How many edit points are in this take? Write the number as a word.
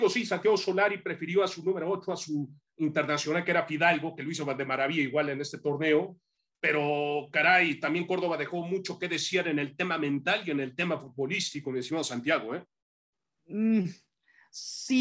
zero